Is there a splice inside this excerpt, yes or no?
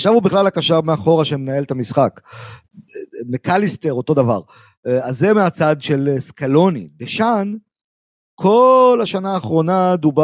no